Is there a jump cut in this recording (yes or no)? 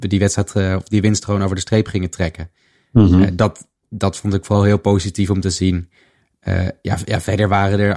no